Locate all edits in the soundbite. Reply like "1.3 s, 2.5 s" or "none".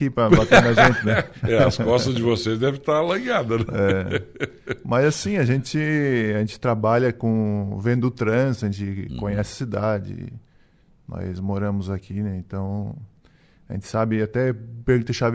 none